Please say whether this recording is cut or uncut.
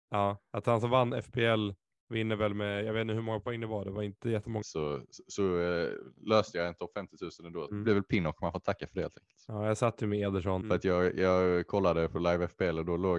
cut